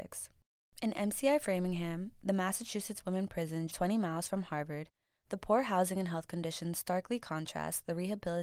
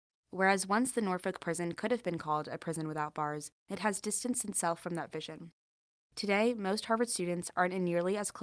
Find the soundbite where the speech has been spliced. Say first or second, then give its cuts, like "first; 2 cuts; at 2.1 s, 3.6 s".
first; 1 cut; at 3.7 s